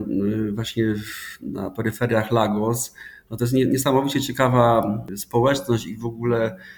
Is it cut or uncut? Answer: uncut